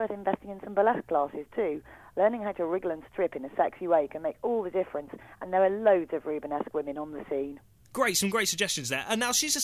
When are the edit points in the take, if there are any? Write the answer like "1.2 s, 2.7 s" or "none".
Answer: none